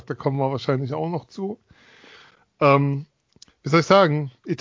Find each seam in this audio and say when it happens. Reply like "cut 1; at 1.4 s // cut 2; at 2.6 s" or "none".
none